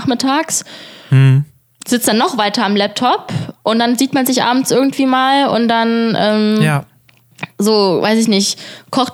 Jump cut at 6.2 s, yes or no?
no